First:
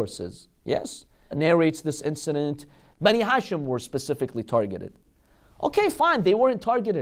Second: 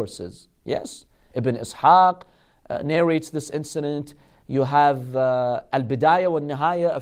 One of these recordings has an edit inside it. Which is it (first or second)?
first